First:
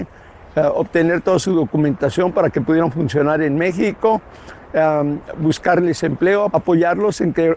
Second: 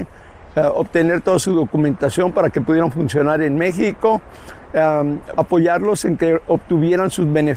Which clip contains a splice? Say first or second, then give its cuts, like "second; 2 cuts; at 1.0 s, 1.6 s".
second; 1 cut; at 5.3 s